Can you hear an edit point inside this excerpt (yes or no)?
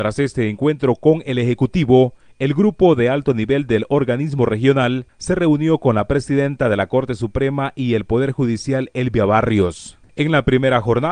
yes